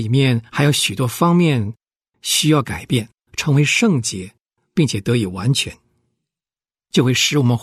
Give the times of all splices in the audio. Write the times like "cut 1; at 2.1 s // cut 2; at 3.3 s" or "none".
none